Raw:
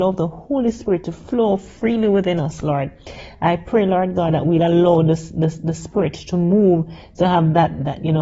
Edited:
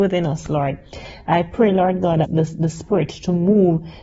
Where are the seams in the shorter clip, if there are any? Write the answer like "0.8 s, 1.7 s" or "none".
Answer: 2.2 s